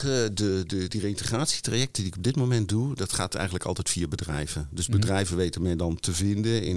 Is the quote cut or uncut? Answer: uncut